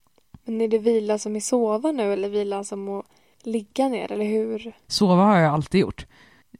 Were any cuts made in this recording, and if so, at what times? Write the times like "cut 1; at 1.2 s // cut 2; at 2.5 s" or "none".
cut 1; at 4.9 s

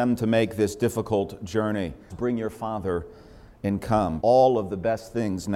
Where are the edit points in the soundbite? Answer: cut 1; at 2.1 s // cut 2; at 4.2 s

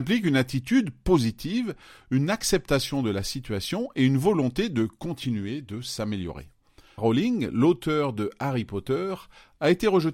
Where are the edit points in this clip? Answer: cut 1; at 7.0 s

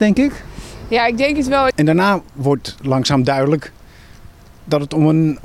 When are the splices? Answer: cut 1; at 1.7 s

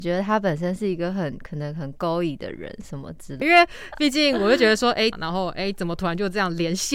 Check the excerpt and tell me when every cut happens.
cut 1; at 3.4 s // cut 2; at 5.1 s

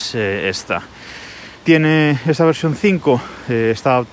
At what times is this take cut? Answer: cut 1; at 1.6 s

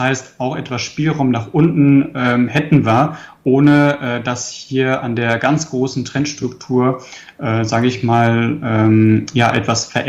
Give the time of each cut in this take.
none

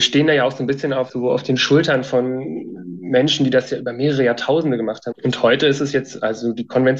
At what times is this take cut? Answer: cut 1; at 5.1 s

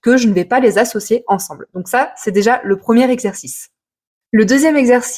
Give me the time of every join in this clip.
none

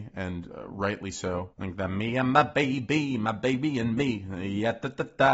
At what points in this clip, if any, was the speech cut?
cut 1; at 1.5 s

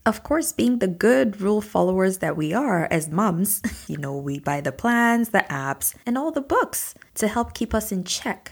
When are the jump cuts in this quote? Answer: cut 1; at 3.9 s

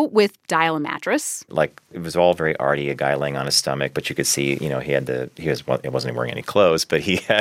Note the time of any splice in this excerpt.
cut 1; at 1.5 s

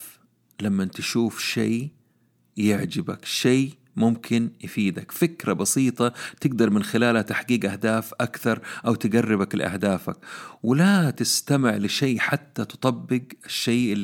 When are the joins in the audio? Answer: none

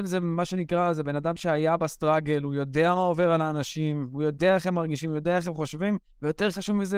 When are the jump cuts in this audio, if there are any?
none

